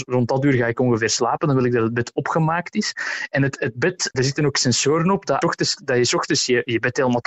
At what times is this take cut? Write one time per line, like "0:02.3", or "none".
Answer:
0:04.1
0:05.4